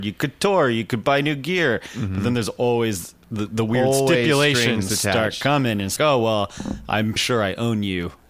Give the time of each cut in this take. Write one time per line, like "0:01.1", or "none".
0:06.0
0:07.2